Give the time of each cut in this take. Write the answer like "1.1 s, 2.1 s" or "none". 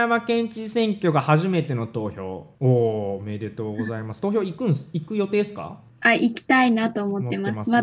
2.6 s